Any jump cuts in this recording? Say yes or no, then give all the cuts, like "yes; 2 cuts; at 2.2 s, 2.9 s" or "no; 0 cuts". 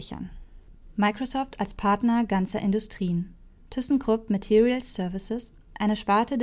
no; 0 cuts